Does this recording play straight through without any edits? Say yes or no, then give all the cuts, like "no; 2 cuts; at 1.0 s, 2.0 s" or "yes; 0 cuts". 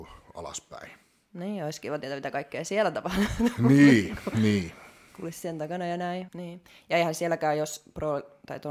no; 1 cut; at 6.3 s